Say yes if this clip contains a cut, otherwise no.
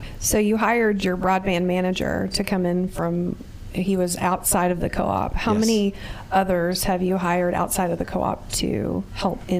no